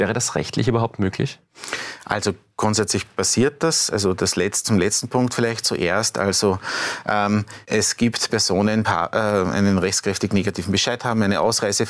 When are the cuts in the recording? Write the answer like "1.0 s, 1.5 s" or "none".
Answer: 7.6 s, 8.8 s